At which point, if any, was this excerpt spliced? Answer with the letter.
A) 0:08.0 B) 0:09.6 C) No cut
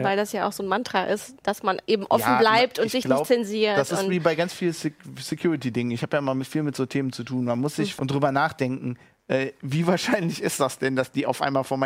A